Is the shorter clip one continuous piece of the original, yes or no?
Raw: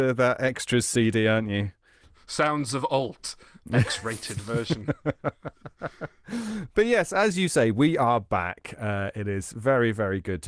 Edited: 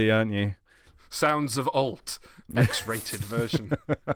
yes